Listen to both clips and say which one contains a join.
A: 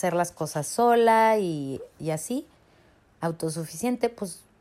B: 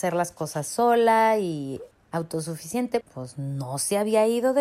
B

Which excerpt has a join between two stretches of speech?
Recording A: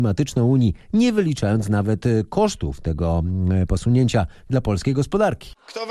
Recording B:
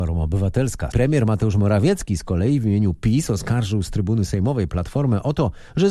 B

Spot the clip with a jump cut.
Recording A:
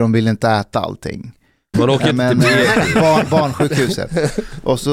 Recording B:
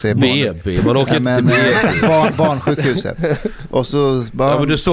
A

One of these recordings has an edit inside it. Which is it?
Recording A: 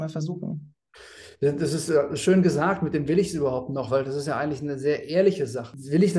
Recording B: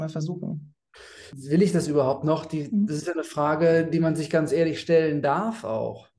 B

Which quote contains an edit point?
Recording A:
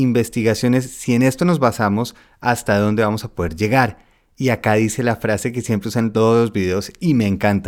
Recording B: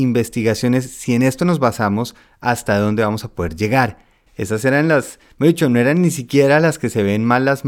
B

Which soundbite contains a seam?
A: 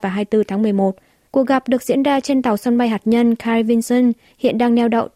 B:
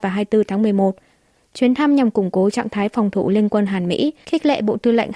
A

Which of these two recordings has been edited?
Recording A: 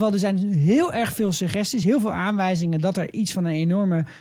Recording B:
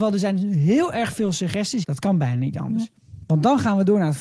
B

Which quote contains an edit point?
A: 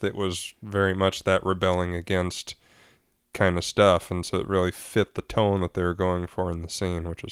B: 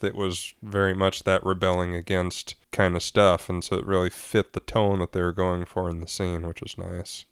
B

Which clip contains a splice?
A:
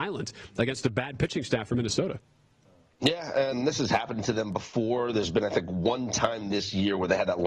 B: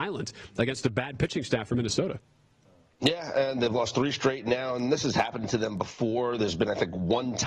A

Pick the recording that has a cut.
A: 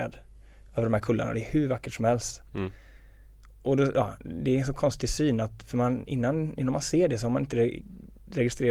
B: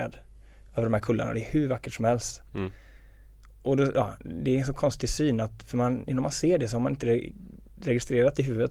B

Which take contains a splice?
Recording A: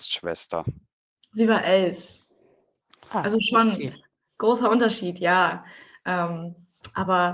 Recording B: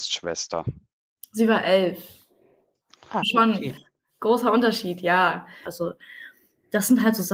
B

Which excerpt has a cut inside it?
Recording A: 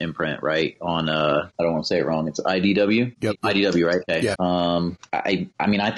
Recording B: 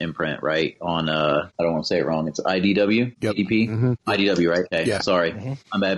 A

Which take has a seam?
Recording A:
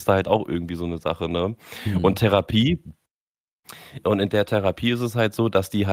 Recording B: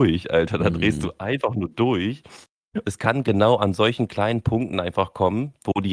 B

